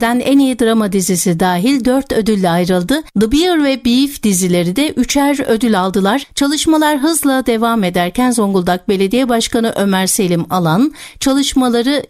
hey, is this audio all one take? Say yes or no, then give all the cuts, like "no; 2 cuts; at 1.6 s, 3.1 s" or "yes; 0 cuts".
no; 1 cut; at 6.3 s